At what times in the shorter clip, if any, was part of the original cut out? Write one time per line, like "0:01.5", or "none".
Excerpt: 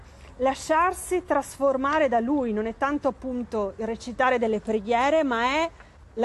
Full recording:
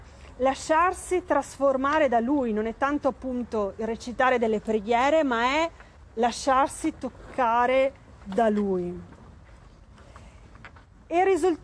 none